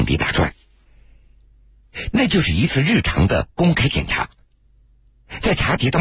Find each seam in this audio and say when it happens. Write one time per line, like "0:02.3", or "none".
0:02.1